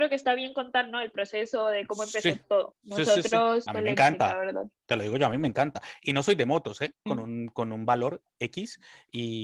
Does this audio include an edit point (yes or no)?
yes